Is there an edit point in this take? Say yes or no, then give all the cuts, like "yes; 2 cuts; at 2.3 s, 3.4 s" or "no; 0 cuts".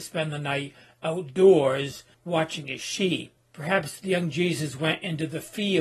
yes; 2 cuts; at 2.1 s, 3.4 s